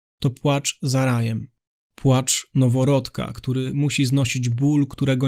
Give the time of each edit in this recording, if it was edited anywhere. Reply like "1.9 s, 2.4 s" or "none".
1.7 s

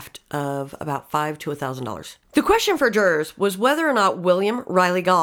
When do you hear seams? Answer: 2.2 s

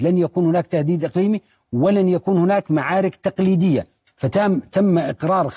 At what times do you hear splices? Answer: 4.1 s

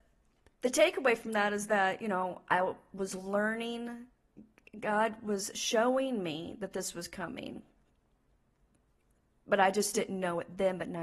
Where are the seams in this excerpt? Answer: none

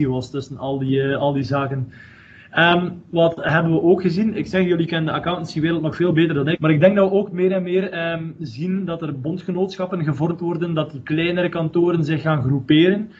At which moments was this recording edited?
6.6 s

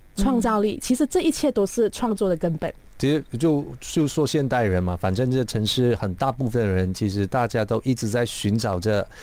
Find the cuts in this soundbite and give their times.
none

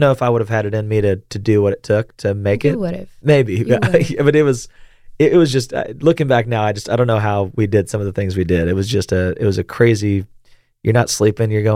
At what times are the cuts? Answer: none

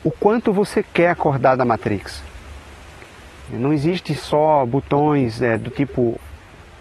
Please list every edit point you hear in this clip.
3.5 s

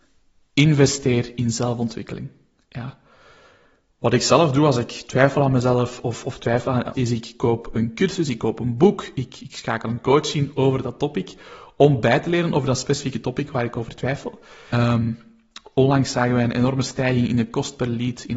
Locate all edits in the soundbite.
6.9 s, 14.7 s

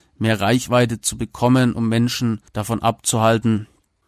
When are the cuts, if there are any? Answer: 2.5 s

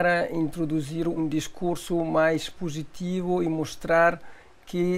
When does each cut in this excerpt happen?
1.2 s

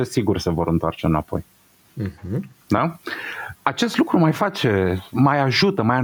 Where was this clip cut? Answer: 2.6 s

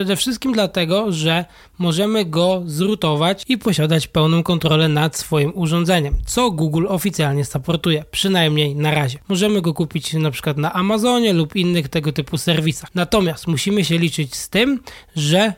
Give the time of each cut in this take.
9.2 s

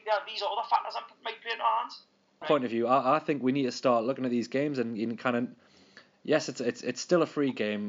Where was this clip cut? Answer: 2.4 s

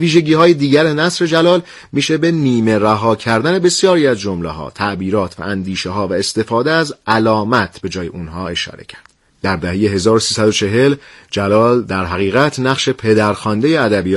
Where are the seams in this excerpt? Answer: 9.3 s

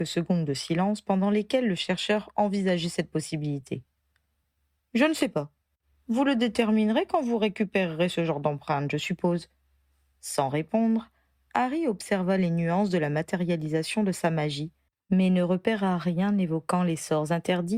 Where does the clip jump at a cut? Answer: none

